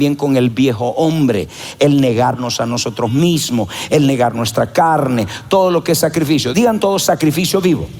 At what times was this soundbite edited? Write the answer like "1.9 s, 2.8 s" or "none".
none